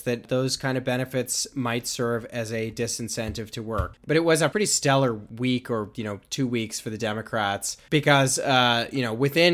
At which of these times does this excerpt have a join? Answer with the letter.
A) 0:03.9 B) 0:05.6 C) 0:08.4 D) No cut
A